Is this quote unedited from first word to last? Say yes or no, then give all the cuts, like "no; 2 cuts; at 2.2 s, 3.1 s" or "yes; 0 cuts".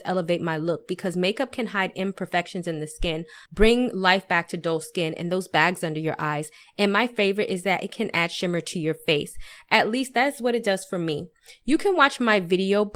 no; 1 cut; at 3.5 s